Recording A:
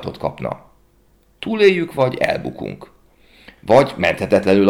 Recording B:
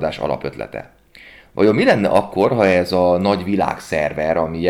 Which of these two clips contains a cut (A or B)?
A